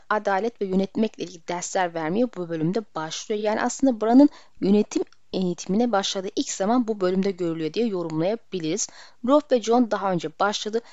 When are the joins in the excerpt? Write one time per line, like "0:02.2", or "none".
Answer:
none